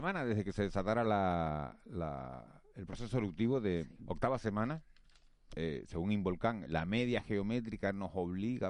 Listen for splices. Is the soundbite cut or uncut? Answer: cut